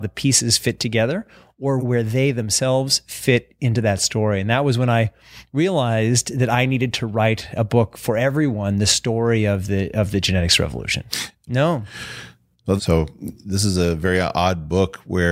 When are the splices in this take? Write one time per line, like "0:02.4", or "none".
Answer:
0:01.8
0:11.5
0:12.8